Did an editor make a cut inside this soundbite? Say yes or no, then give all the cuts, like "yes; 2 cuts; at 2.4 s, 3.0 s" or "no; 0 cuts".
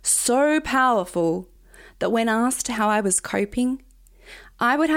no; 0 cuts